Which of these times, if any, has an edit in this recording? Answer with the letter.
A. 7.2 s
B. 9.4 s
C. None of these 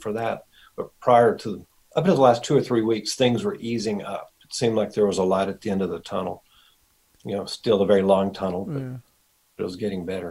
C